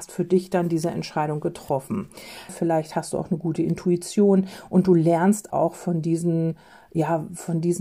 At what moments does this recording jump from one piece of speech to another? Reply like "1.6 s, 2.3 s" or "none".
2.5 s, 5.5 s